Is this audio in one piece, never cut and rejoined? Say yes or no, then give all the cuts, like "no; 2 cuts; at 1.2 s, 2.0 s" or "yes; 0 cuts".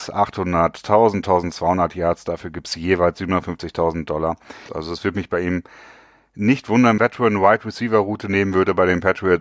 no; 2 cuts; at 4.7 s, 7.0 s